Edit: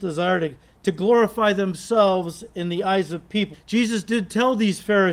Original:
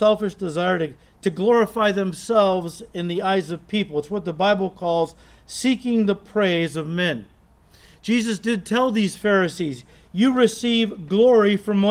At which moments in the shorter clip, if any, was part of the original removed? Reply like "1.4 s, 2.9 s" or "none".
3.5 s